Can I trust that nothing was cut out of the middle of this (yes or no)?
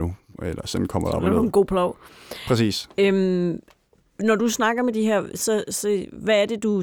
yes